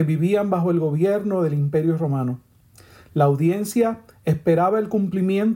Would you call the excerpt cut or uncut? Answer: uncut